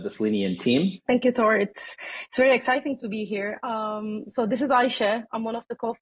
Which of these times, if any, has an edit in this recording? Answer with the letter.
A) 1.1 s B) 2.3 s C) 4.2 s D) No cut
A